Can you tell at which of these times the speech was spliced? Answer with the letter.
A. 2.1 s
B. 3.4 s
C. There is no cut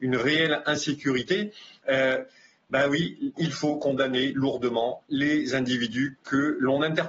B